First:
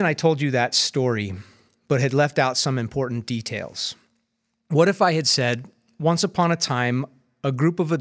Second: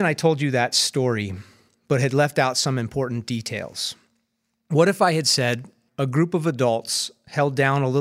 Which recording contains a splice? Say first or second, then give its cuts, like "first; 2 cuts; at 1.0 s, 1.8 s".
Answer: second; 1 cut; at 5.9 s